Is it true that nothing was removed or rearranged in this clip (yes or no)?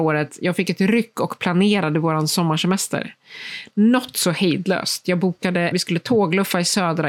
no